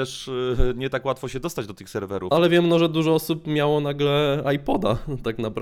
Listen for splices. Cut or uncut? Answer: cut